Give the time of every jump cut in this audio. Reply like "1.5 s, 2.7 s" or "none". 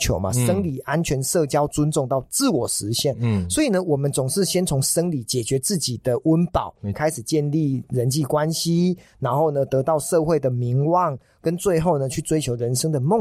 6.9 s